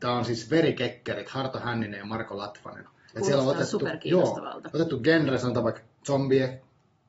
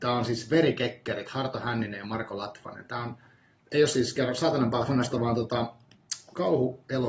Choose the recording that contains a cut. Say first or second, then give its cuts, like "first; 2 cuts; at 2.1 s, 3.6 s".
first; 1 cut; at 2.9 s